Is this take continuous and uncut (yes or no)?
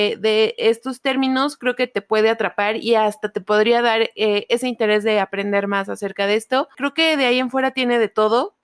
yes